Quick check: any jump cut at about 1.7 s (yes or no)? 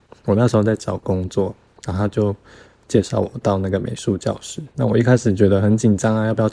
yes